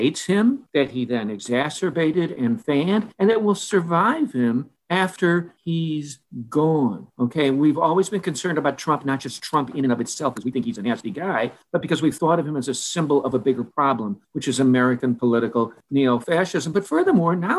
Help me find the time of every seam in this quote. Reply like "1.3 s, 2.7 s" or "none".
10.3 s